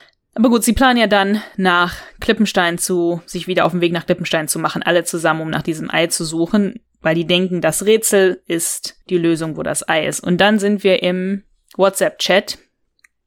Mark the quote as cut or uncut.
cut